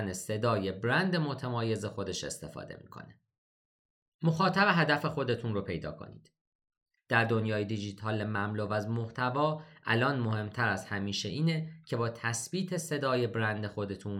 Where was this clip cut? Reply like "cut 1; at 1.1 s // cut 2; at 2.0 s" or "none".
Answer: cut 1; at 7.0 s